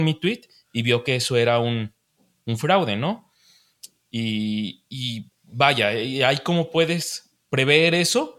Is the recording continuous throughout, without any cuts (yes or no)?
yes